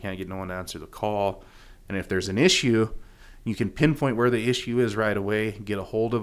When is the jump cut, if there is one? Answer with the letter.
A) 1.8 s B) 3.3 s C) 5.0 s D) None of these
A